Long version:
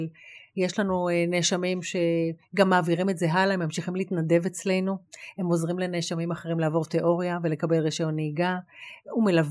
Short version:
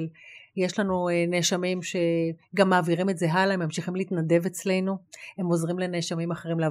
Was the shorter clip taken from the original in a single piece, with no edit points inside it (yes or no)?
yes